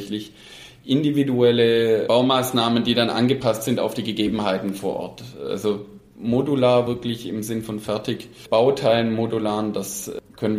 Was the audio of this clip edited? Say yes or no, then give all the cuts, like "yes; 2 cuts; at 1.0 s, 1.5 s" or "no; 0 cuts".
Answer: no; 0 cuts